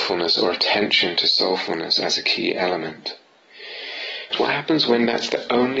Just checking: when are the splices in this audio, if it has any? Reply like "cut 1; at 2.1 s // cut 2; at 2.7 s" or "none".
cut 1; at 4.3 s